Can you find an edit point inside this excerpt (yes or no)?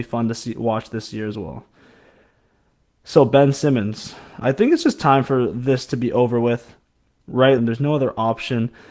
yes